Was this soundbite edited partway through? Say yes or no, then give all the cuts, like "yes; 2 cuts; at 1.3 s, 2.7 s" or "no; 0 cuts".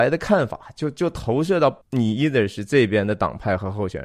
yes; 1 cut; at 1.8 s